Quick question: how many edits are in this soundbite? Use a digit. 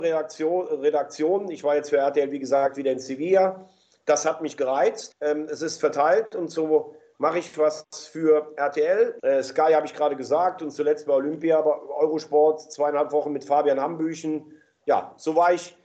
2